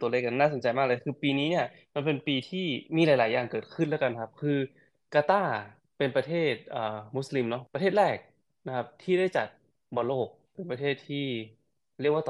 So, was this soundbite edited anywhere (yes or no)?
no